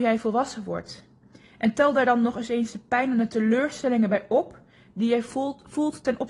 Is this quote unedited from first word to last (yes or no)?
yes